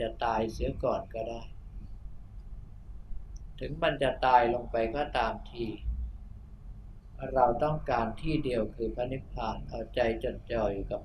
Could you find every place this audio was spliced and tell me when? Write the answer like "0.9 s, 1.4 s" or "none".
none